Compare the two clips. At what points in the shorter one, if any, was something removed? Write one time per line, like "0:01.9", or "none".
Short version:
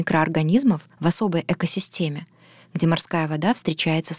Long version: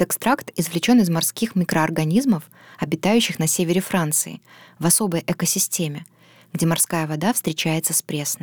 0:00.9